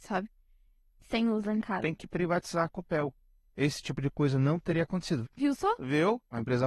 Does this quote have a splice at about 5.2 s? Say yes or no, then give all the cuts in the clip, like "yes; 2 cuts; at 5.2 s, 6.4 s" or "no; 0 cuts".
yes; 2 cuts; at 0.9 s, 5.2 s